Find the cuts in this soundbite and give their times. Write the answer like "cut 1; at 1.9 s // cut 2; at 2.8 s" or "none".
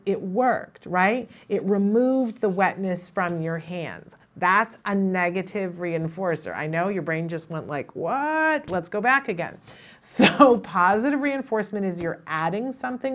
none